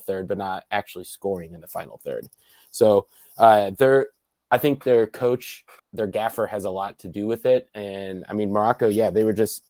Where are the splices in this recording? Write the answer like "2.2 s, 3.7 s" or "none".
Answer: 5.8 s

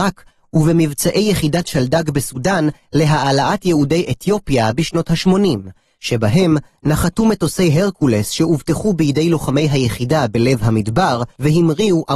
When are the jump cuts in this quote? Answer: none

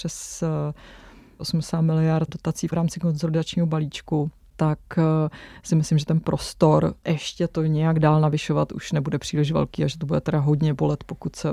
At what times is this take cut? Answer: 2.3 s

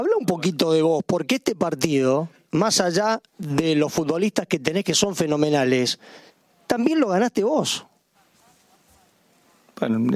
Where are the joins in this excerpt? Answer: 3.3 s

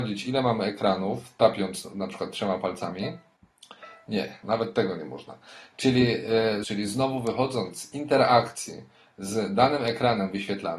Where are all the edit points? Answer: 4.4 s, 6.6 s

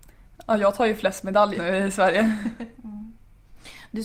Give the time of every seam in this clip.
1.5 s, 2.8 s

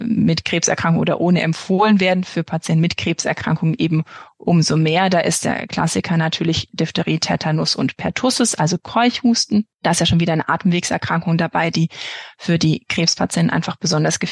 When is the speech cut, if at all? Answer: none

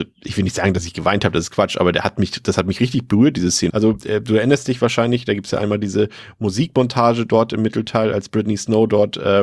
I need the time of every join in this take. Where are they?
3.7 s

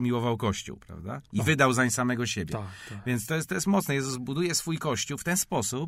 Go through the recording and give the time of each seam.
none

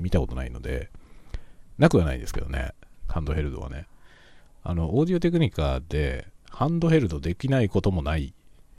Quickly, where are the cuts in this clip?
3.0 s

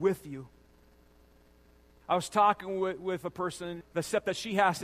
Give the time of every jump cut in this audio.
2.0 s, 3.8 s

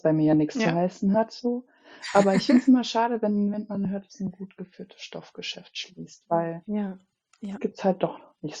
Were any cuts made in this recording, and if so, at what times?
none

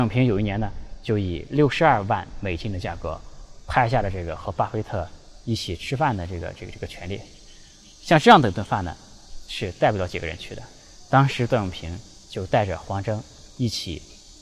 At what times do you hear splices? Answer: none

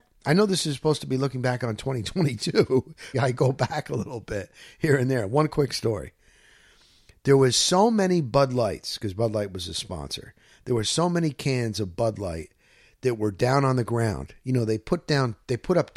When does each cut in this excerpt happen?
3.1 s

